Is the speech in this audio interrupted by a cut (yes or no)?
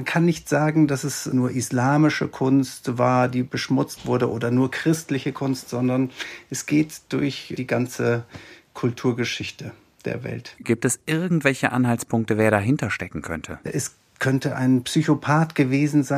yes